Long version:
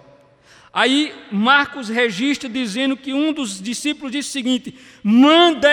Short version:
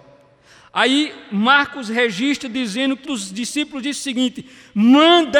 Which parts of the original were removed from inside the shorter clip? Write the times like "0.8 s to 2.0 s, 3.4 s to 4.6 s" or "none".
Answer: 3.0 s to 3.3 s